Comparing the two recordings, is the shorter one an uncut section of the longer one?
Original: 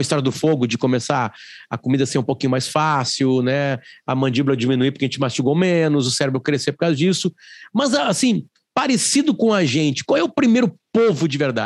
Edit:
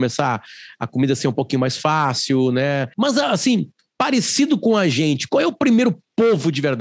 no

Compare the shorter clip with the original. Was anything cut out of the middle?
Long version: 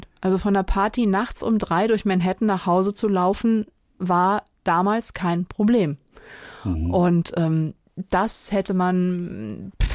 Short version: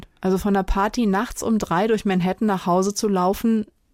no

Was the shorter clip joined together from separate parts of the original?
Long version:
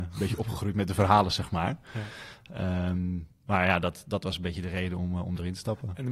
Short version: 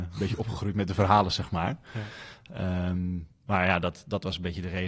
no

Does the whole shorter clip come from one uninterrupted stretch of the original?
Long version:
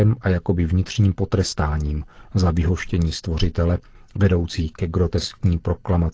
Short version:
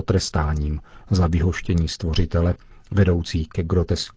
yes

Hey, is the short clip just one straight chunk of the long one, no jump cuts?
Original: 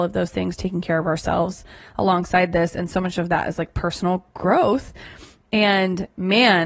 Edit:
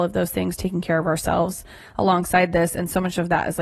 yes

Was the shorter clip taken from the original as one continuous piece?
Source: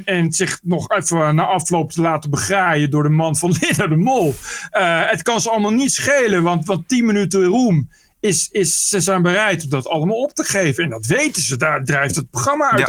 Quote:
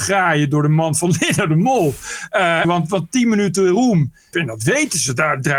no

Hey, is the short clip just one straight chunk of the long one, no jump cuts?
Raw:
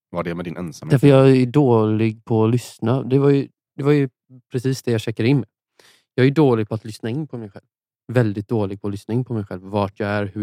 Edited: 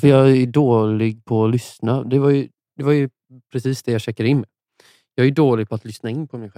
yes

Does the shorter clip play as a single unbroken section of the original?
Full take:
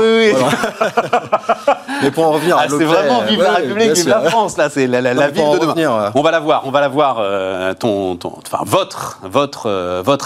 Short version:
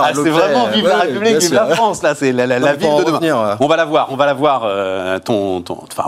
yes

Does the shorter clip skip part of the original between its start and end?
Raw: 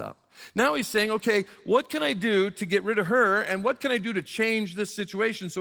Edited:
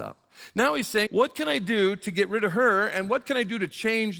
yes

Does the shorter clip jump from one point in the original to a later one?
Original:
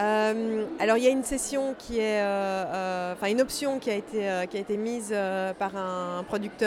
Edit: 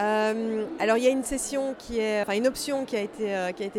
yes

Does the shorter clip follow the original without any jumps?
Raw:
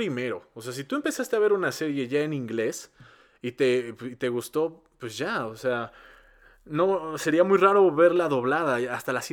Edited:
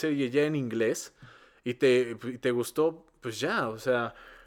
yes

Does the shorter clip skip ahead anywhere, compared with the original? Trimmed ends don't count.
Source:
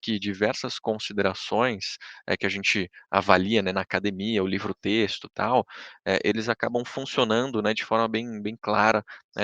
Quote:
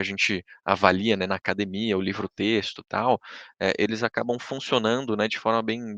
no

